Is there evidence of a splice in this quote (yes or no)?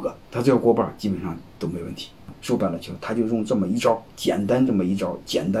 yes